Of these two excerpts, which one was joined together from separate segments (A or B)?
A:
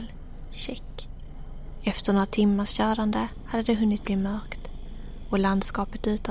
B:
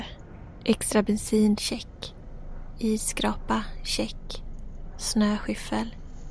B